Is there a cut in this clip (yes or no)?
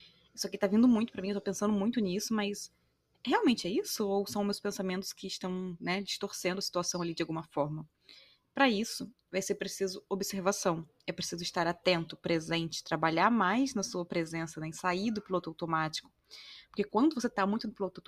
no